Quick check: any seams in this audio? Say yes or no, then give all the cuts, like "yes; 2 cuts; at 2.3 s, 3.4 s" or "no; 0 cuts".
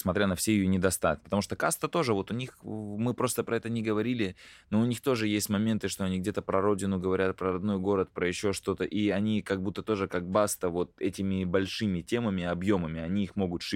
yes; 1 cut; at 1.2 s